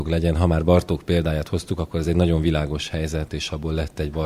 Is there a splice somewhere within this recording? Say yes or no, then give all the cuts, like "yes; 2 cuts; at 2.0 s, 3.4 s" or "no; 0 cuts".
yes; 1 cut; at 3.3 s